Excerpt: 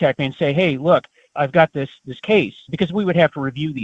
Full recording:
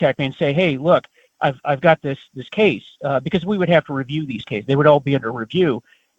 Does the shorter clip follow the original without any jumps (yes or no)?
no